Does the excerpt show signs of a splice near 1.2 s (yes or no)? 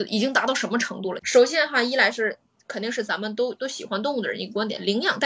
yes